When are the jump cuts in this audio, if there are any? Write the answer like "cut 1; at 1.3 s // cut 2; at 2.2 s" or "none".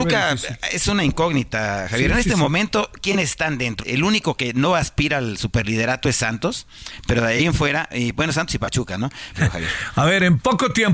cut 1; at 3.8 s // cut 2; at 9.3 s